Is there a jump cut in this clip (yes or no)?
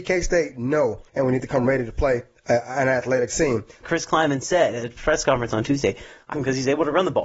yes